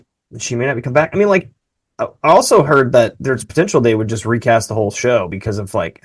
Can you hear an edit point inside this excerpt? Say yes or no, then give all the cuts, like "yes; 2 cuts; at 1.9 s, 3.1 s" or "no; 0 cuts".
no; 0 cuts